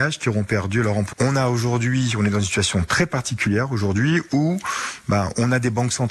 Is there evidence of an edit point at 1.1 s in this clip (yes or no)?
yes